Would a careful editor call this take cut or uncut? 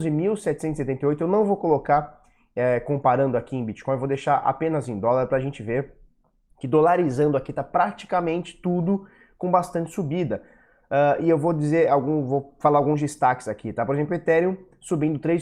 uncut